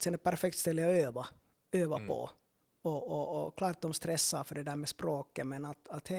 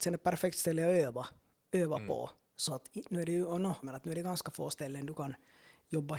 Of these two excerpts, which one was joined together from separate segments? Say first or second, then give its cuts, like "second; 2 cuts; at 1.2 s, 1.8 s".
second; 2 cuts; at 2.5 s, 3.8 s